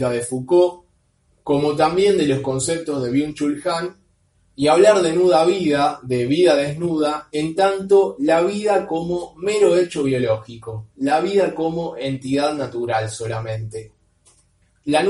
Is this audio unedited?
yes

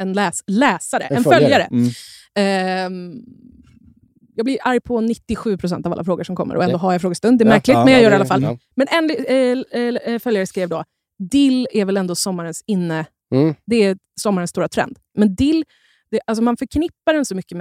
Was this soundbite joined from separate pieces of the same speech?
yes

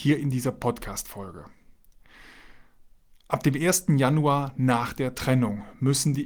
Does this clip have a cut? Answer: no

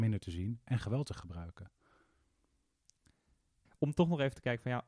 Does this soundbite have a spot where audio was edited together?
yes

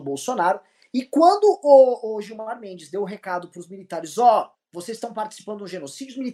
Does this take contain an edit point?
yes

